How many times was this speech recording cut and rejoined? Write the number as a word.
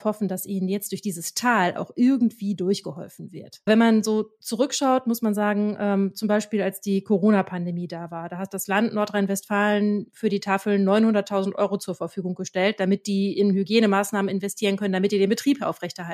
zero